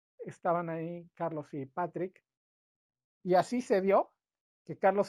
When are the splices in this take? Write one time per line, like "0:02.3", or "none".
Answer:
0:03.0